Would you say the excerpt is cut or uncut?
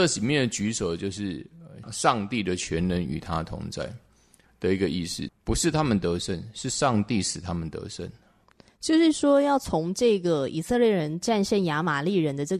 cut